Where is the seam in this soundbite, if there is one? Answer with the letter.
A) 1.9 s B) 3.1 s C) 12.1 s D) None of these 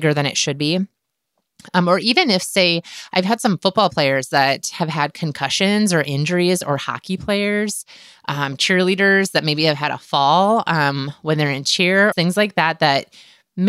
C